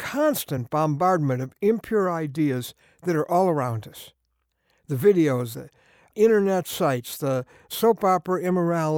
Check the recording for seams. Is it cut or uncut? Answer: cut